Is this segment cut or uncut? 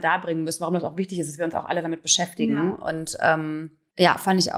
uncut